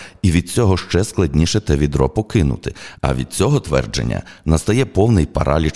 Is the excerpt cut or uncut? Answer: cut